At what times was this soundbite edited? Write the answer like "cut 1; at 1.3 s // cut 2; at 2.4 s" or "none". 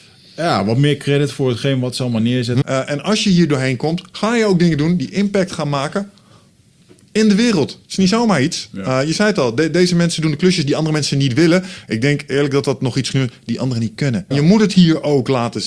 cut 1; at 2.6 s // cut 2; at 14.3 s